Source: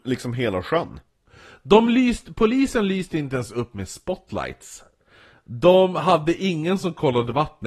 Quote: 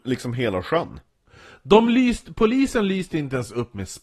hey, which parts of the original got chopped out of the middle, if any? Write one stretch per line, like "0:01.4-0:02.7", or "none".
none